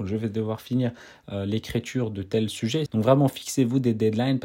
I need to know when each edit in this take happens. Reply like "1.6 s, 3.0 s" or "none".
2.9 s